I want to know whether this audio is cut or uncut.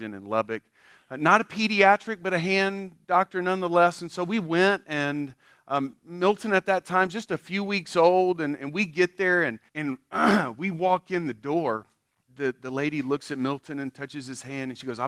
cut